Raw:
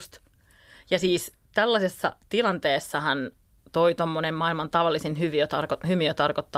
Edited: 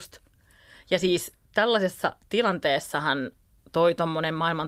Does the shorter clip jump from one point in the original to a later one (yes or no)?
no